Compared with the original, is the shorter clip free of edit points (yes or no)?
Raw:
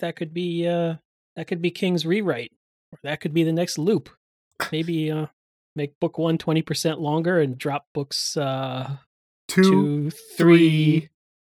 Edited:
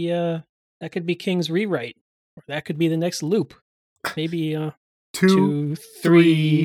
no